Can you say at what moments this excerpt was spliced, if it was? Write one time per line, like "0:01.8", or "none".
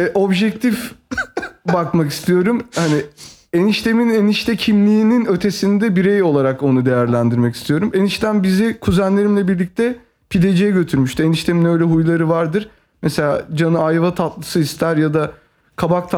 none